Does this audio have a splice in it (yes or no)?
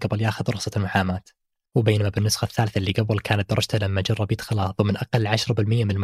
no